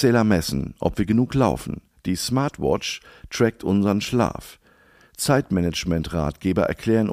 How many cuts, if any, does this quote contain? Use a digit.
0